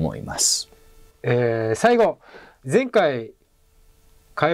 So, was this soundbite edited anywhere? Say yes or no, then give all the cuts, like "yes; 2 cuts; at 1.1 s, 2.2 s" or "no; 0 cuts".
yes; 1 cut; at 1.1 s